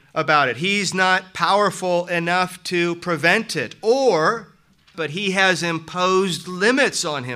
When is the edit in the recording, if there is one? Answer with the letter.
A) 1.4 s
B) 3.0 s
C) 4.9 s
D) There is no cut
C